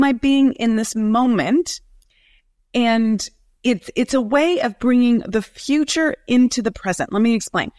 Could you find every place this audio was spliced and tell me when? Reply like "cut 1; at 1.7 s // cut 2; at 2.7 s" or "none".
none